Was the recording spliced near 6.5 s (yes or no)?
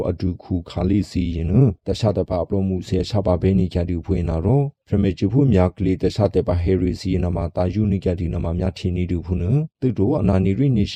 no